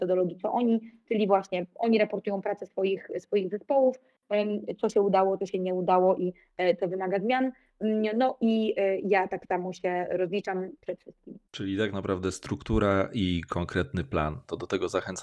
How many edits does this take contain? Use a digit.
1